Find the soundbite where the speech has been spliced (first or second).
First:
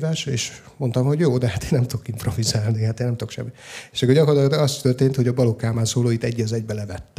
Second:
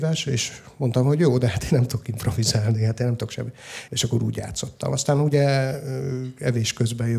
second